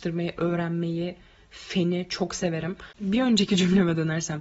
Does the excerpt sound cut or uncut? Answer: cut